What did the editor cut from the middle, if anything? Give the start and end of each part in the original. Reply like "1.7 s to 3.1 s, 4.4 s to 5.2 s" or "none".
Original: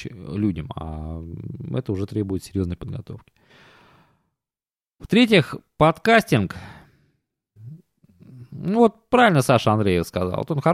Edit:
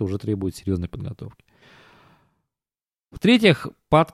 none